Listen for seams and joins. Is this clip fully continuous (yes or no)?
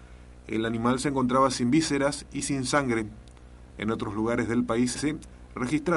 no